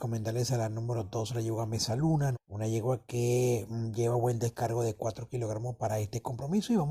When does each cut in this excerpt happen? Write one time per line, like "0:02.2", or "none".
0:02.3